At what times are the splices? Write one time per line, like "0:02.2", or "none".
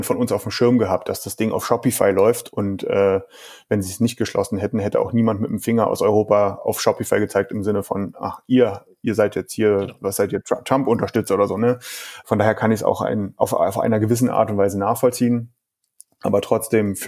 0:12.2